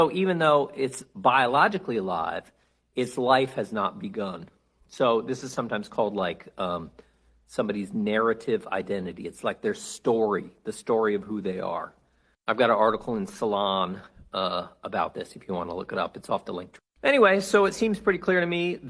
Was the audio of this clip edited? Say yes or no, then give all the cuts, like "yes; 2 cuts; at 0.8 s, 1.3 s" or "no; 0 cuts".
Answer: no; 0 cuts